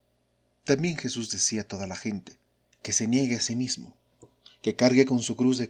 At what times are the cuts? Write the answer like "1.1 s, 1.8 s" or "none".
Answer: 2.7 s